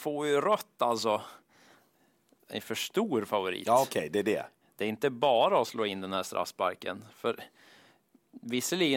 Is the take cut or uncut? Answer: uncut